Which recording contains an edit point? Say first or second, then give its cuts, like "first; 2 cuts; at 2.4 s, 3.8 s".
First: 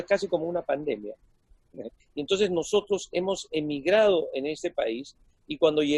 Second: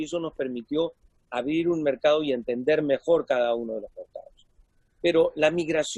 first; 1 cut; at 2.0 s